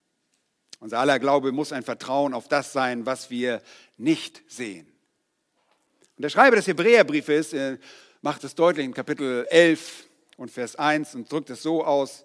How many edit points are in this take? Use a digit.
0